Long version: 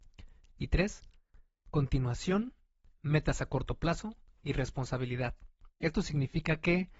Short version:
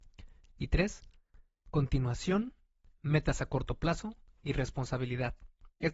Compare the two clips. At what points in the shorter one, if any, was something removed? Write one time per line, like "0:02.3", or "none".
none